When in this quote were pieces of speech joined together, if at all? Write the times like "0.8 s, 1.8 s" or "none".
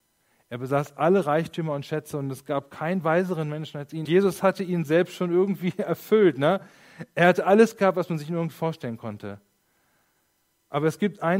4.1 s

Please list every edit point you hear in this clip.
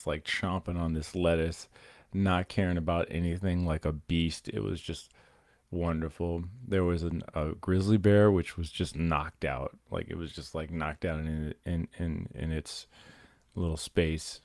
none

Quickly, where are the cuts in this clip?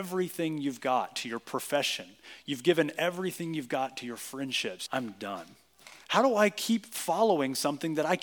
4.9 s, 6.0 s

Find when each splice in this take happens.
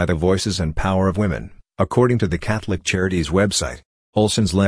none

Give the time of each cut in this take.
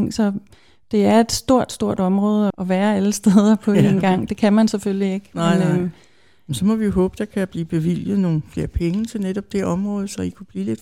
2.5 s

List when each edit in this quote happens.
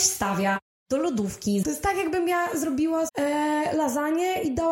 1.6 s, 3.1 s

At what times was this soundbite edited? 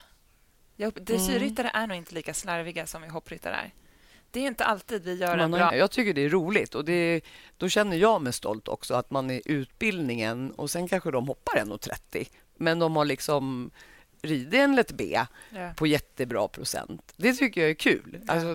5.7 s

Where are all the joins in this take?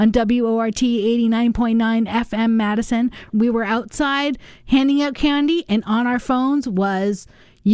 3.3 s

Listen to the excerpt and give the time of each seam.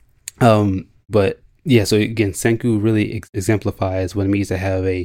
none

